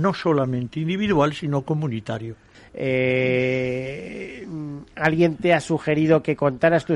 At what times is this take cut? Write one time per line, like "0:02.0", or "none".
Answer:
0:02.5